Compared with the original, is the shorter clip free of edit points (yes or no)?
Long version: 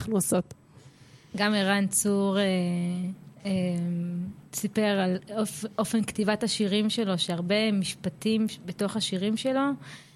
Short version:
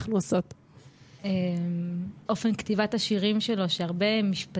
no